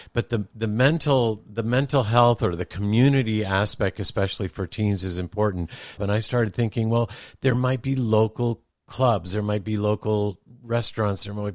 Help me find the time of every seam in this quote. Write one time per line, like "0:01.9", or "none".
0:06.0